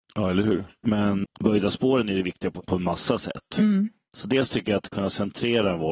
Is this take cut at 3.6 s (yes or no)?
no